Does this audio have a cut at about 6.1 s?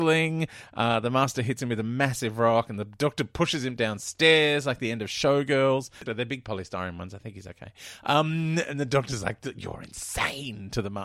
yes; 1 cut; at 6.1 s

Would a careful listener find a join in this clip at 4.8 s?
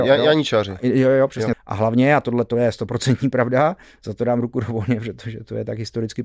no; 1 cut; at 1.5 s

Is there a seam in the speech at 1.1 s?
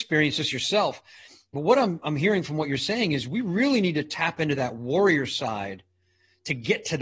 no; 0 cuts

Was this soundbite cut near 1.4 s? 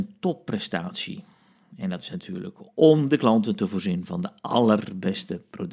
no; 0 cuts

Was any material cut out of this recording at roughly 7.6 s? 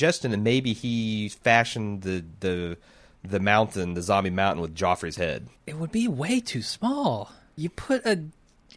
yes; 2 cuts; at 5.6 s, 7.6 s

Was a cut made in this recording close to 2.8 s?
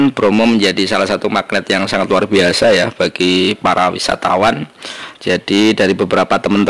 no; 1 cut; at 5.1 s

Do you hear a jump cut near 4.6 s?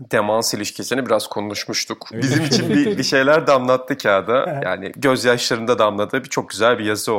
no; 1 cut; at 2.1 s

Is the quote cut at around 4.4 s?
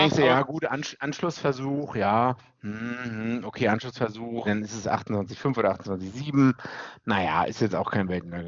yes; 1 cut; at 4.4 s

